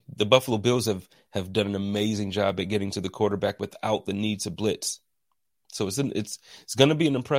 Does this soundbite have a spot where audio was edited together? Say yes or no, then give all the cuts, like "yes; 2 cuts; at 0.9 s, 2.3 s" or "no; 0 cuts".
yes; 1 cut; at 5.6 s